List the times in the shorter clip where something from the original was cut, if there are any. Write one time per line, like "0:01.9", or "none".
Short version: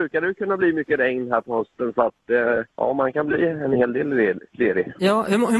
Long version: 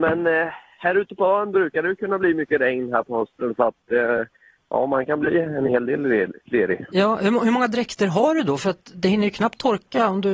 0:02.7